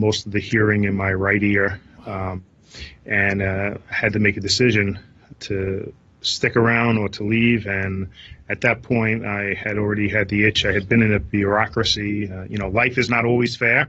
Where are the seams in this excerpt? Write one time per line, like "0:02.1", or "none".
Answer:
0:05.3